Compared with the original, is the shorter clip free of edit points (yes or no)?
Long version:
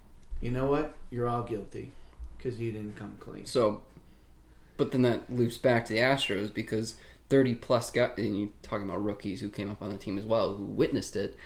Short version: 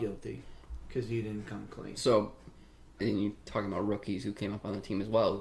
no